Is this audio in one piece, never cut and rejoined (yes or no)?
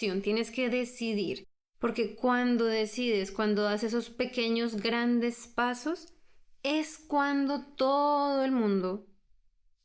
yes